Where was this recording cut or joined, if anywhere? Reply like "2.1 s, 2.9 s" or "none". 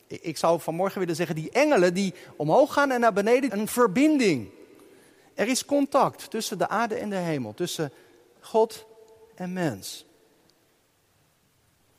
3.5 s

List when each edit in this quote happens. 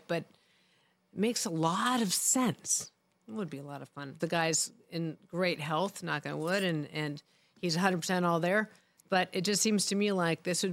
3.1 s, 4.2 s

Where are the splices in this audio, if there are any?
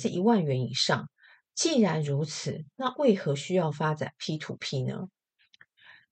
1.5 s

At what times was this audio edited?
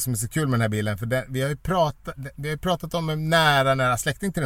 2.1 s

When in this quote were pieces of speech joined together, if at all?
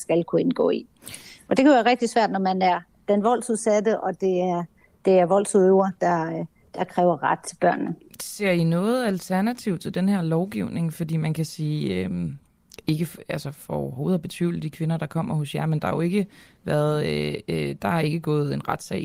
none

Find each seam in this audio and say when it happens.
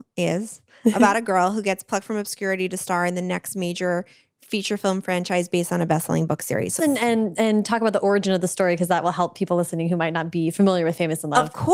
6.8 s

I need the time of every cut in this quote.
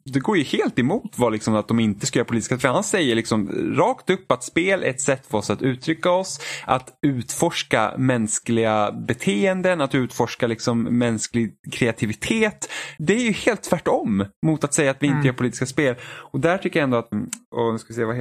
13.0 s, 17.1 s

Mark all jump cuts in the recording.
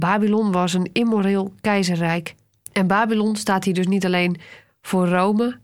2.5 s

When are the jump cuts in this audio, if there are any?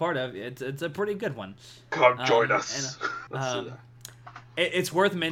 3.3 s

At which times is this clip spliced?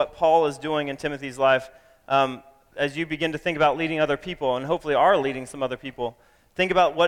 2.7 s

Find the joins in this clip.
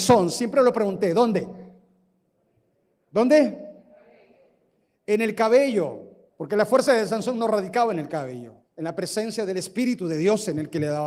6.3 s, 8.6 s

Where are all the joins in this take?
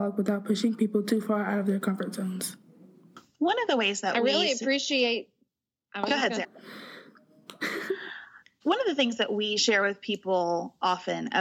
6.4 s, 8.6 s

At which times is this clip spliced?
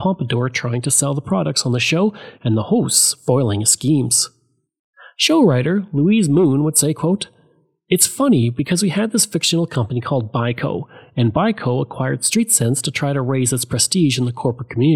none

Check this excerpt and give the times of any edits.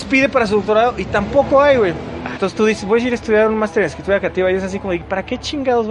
2.4 s

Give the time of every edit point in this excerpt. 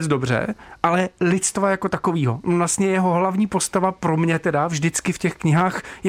none

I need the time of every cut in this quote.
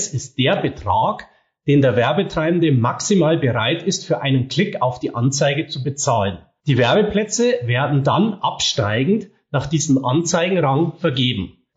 6.6 s

